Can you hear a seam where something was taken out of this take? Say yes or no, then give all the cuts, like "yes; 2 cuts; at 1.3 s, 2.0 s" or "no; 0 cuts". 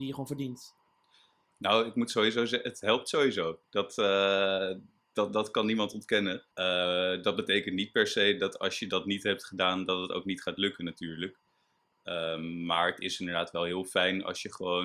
yes; 1 cut; at 6.5 s